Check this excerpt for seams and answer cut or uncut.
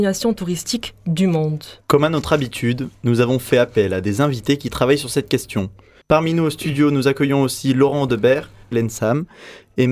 cut